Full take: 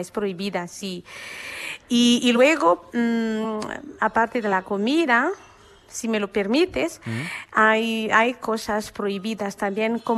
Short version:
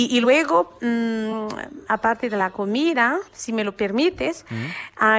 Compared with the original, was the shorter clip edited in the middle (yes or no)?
yes